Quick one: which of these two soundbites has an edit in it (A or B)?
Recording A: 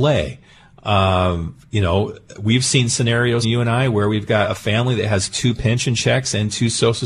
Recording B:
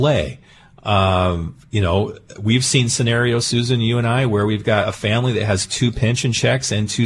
A